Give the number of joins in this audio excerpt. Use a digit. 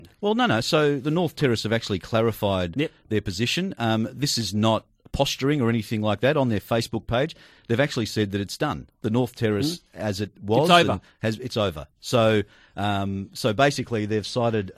0